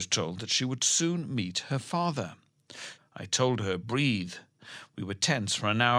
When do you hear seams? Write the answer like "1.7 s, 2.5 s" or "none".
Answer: 3.0 s